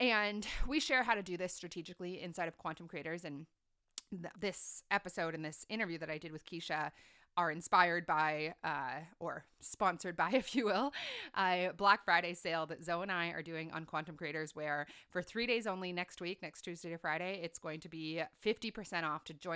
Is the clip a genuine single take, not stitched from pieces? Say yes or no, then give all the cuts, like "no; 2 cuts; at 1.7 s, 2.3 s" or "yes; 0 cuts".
no; 1 cut; at 4.3 s